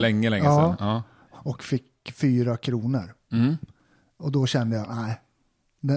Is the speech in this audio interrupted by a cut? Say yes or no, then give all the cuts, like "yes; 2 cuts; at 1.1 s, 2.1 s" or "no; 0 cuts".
yes; 1 cut; at 1.4 s